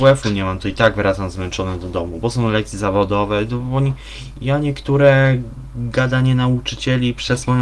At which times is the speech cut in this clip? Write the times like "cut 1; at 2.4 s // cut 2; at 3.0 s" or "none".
cut 1; at 4.3 s